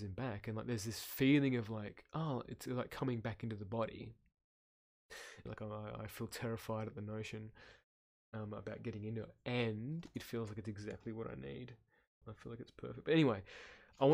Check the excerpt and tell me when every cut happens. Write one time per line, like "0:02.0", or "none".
0:05.5
0:12.2